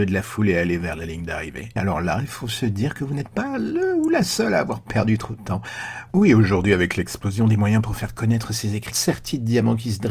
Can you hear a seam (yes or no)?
yes